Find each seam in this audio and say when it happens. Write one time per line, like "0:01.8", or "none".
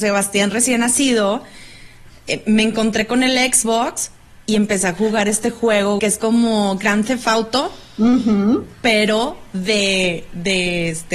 0:06.0

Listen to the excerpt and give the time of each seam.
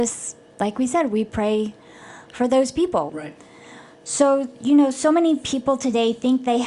0:03.1

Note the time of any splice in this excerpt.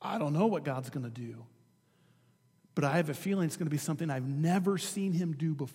none

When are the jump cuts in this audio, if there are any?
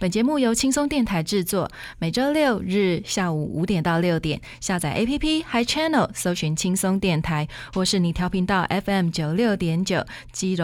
none

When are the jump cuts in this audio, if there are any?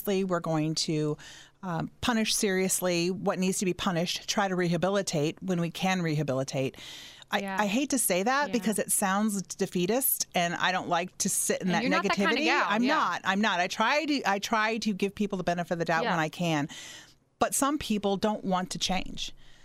0:07.3

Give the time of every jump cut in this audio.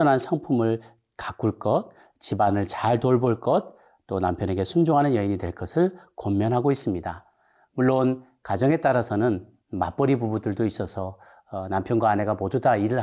none

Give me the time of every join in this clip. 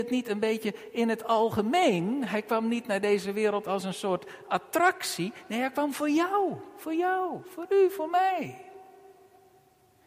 none

